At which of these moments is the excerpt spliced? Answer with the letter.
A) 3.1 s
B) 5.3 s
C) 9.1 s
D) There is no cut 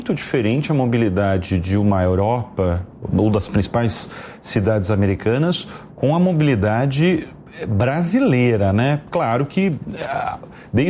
A